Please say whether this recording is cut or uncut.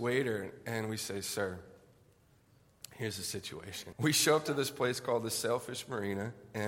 cut